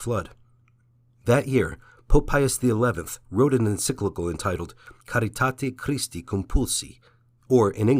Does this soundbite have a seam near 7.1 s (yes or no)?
no